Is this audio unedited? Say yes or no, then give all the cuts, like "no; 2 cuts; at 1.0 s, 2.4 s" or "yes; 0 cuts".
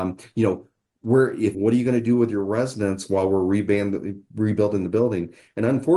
no; 1 cut; at 1.5 s